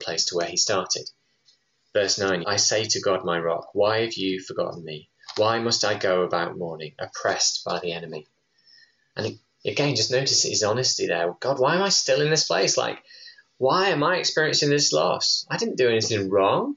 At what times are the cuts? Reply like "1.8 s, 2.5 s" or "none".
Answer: 2.4 s

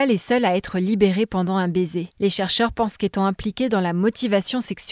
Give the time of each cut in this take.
2.1 s

